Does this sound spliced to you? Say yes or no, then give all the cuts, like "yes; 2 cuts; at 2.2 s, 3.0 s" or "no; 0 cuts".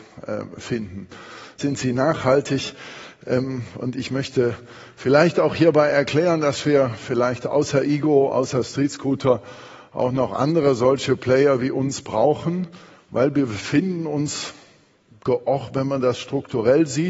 yes; 1 cut; at 1.6 s